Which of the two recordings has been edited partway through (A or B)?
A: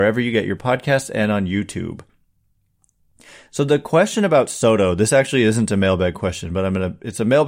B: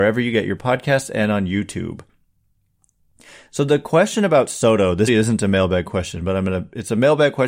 B